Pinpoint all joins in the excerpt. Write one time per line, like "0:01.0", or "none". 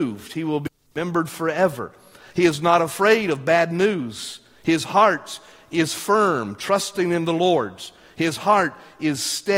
none